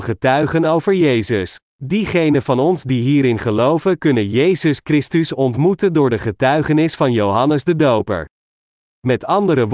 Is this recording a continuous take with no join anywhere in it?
no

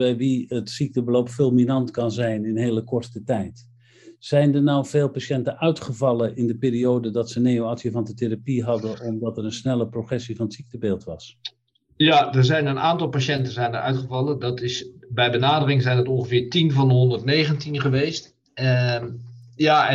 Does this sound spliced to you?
no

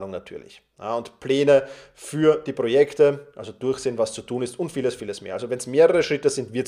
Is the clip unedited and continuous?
yes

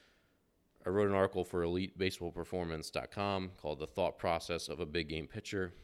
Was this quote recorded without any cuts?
yes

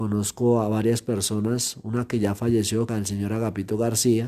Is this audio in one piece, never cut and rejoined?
no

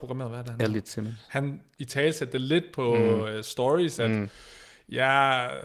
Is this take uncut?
yes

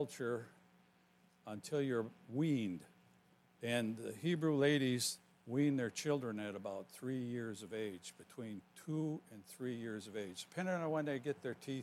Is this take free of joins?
no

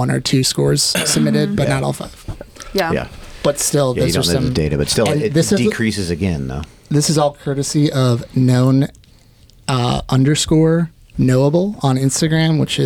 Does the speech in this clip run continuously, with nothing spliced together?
yes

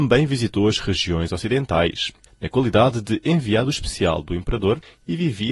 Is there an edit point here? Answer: yes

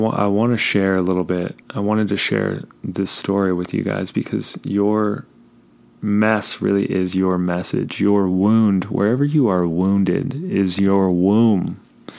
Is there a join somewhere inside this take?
yes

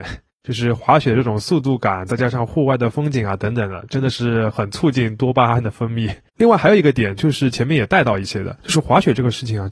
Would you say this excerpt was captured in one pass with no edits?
no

